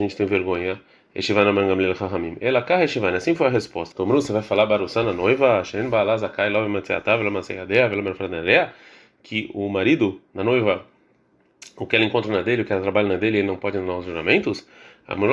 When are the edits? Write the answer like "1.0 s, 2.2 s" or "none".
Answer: 3.9 s